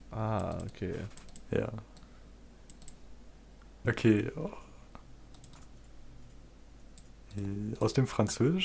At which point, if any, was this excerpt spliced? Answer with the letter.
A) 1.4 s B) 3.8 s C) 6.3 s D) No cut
B